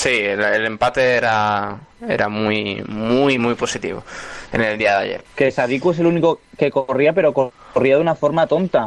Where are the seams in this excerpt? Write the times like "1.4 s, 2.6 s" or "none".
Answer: 3.4 s, 5.2 s